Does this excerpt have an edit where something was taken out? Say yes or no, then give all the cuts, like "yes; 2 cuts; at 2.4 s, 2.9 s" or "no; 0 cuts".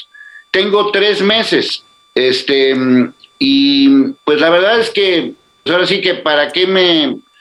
yes; 1 cut; at 5.7 s